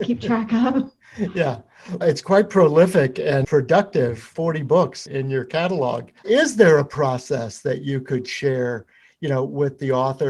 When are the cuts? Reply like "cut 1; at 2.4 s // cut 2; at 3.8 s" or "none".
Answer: cut 1; at 2.0 s // cut 2; at 6.2 s

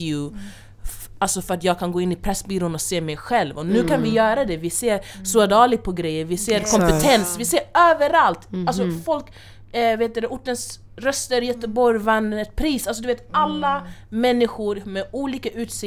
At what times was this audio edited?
none

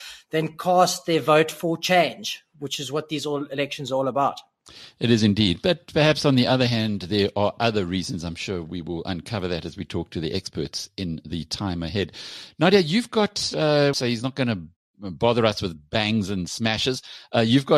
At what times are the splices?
cut 1; at 13.9 s

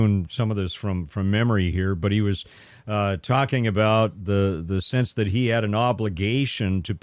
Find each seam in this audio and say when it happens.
none

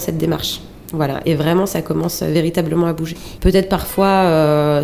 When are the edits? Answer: cut 1; at 1.2 s // cut 2; at 3.4 s

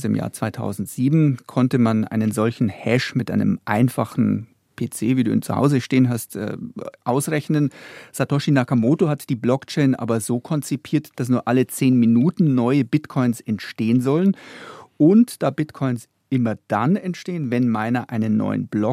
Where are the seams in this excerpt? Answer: none

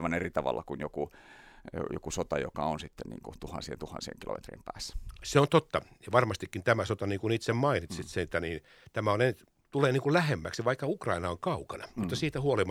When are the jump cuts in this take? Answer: none

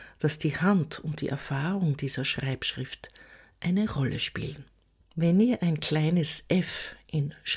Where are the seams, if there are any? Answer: cut 1; at 5.1 s

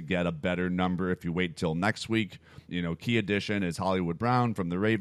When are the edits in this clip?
cut 1; at 2.7 s

